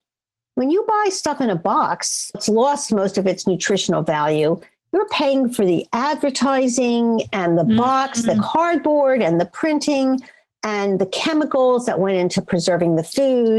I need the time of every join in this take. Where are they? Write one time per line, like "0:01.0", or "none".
0:02.3